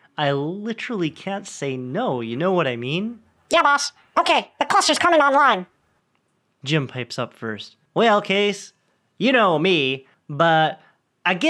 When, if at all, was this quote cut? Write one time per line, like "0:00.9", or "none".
0:07.9
0:10.1